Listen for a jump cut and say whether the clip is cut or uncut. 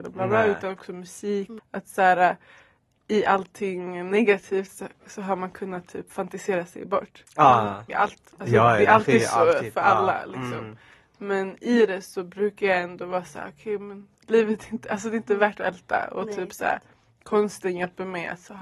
cut